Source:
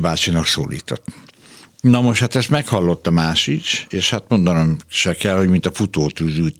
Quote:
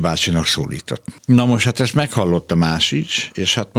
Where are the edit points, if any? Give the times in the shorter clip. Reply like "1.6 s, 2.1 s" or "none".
1.2 s